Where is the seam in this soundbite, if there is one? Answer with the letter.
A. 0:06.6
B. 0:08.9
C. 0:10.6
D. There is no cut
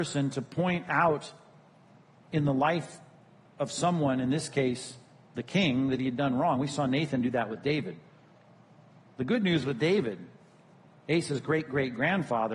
D